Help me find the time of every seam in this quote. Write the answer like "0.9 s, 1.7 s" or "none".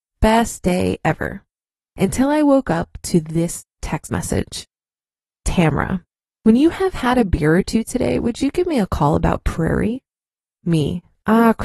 none

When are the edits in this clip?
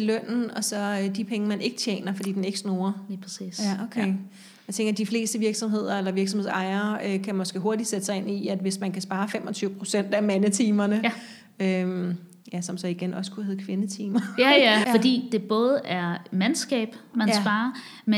14.8 s, 17.1 s

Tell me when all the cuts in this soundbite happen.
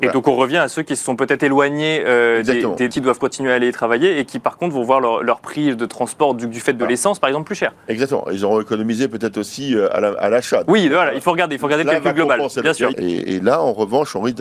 2.9 s, 12.9 s

